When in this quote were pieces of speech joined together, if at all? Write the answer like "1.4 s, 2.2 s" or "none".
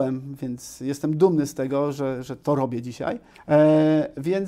3.4 s